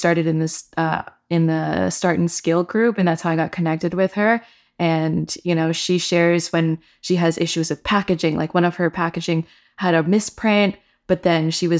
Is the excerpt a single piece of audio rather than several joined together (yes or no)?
yes